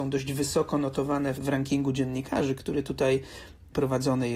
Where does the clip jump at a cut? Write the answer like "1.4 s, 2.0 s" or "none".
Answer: 1.4 s